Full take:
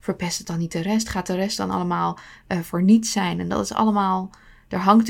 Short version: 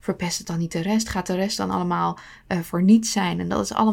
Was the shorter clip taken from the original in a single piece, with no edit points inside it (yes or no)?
yes